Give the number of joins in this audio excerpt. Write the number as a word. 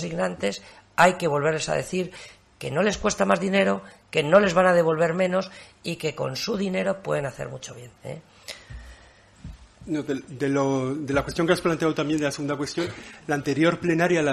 one